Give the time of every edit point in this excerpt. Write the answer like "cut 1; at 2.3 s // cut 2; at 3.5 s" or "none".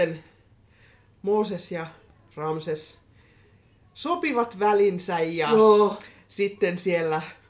none